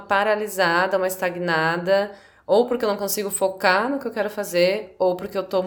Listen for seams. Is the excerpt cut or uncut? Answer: uncut